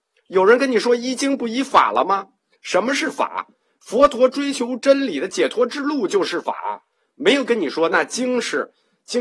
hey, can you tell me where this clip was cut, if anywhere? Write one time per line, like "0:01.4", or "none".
none